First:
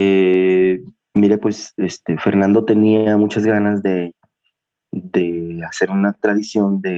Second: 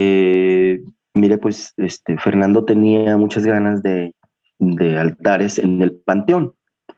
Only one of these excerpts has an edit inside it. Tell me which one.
second; 1 cut; at 4.6 s

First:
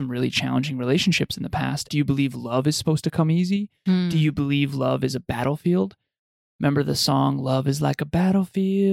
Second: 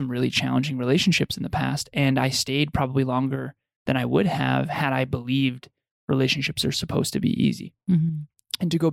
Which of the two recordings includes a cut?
first; 1 cut; at 1.9 s

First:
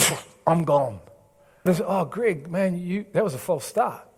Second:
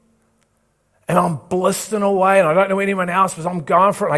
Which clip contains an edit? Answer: first; 1 cut; at 1.7 s

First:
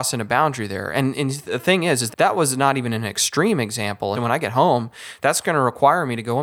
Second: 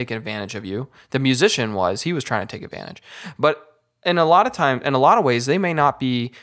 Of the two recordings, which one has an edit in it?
first; 2 cuts; at 2.1 s, 4.1 s

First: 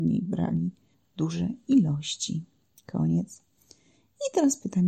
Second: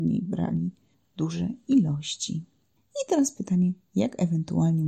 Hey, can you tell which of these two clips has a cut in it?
second; 1 cut; at 2.8 s

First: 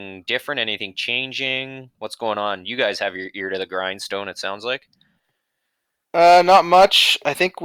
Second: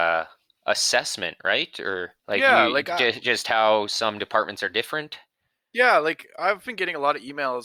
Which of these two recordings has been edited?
second; 1 cut; at 2.2 s

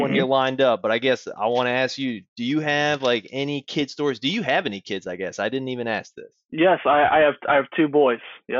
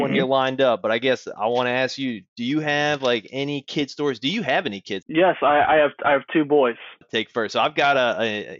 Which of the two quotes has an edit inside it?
second; 2 cuts; at 5.0 s, 7.0 s

